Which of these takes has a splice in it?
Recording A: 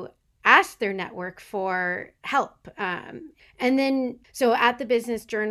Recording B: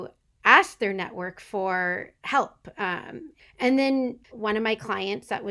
B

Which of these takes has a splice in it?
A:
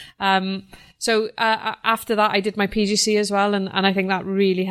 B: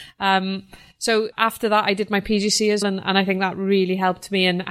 B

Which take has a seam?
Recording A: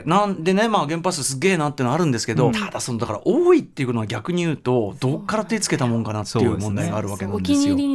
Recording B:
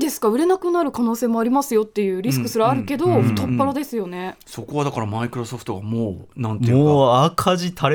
A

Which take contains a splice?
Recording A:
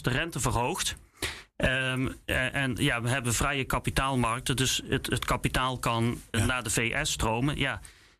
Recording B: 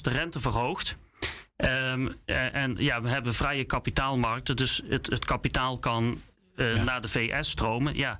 A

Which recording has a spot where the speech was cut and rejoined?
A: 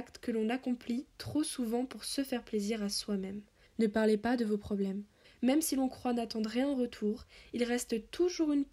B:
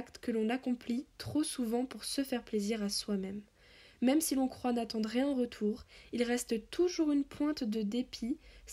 A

